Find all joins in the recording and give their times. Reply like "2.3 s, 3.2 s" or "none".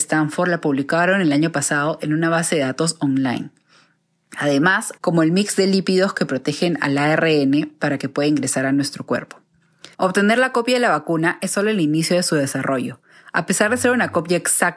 5.0 s, 9.9 s